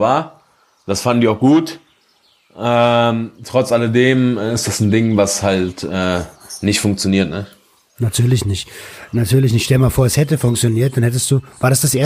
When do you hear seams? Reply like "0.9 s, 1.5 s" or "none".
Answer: none